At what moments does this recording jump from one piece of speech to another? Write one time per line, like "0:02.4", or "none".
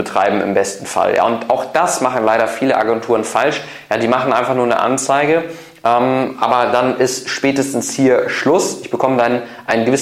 none

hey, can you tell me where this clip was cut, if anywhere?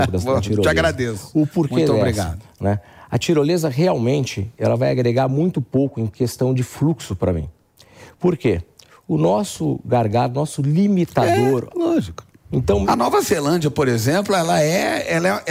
0:11.7
0:12.8

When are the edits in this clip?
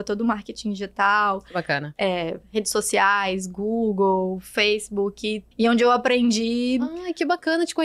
0:05.5

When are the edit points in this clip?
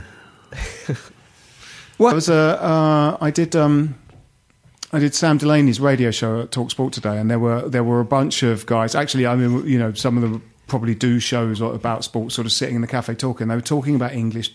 0:02.1

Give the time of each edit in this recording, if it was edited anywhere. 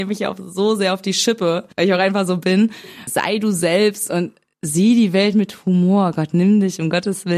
0:01.7
0:03.1

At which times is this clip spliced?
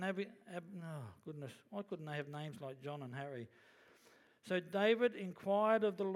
0:04.3

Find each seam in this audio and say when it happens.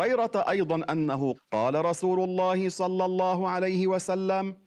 0:01.3

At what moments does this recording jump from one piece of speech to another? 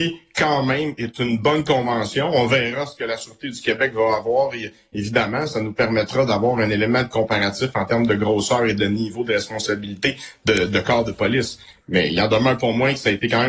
none

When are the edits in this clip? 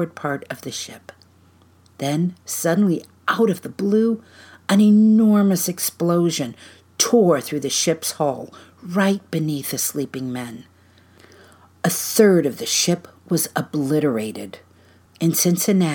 0:15.1

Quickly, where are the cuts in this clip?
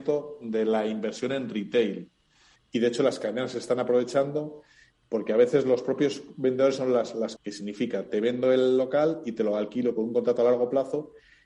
0:02.6
0:07.4

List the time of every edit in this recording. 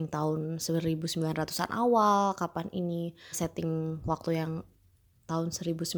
0:03.3

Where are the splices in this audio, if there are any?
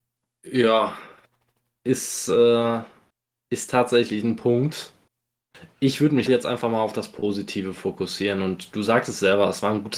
0:06.3

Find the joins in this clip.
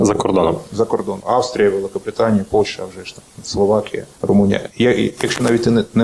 0:01.2
0:04.1

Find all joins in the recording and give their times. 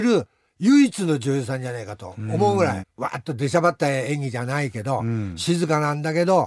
0:02.8

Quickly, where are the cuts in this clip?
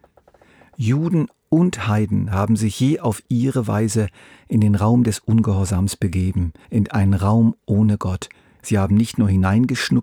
0:06.7
0:08.6

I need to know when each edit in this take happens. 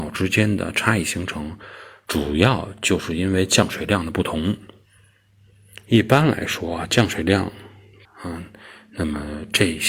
0:08.0

